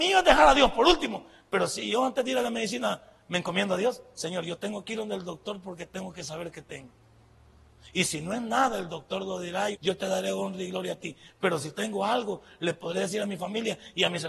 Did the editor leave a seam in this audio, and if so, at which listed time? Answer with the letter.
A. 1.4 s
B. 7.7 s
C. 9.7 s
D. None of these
C